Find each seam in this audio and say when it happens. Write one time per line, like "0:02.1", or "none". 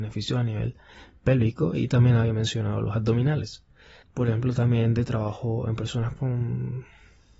0:04.0